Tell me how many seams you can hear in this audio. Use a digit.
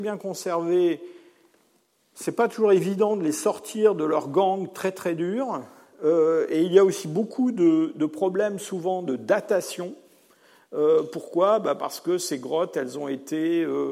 0